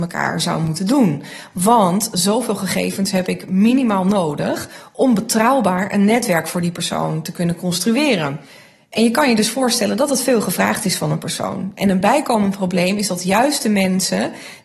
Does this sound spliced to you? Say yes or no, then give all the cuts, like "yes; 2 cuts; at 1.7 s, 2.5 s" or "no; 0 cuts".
no; 0 cuts